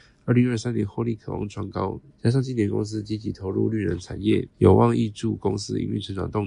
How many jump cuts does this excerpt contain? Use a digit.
2